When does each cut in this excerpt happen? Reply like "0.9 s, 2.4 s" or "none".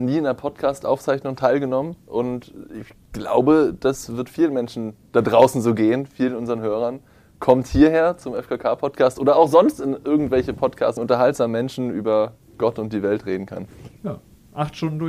11.0 s, 14.0 s